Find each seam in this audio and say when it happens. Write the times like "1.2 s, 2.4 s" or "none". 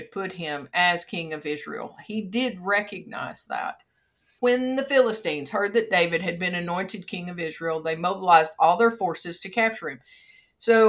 4.4 s